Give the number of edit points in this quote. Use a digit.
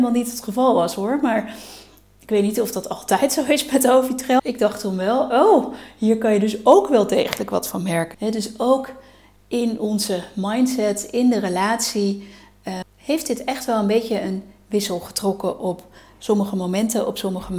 3